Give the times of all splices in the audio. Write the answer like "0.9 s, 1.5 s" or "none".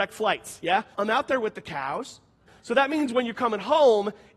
0.9 s, 2.5 s